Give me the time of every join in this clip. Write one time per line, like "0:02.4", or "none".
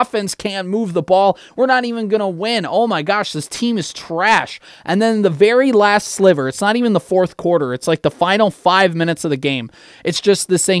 none